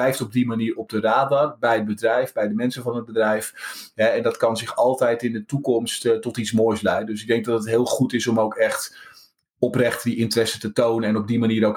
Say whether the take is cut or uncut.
uncut